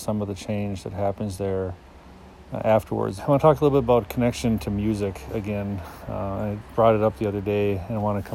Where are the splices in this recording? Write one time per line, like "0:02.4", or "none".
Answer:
0:03.2